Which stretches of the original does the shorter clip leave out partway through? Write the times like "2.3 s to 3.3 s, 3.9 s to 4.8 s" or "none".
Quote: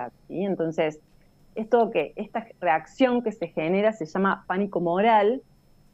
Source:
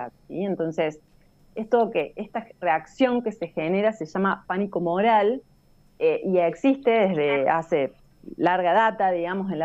none